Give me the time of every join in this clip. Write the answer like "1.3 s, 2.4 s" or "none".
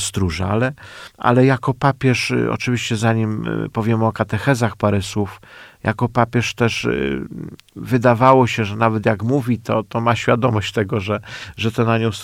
none